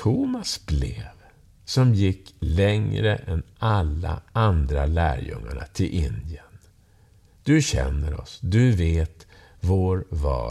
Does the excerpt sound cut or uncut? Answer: uncut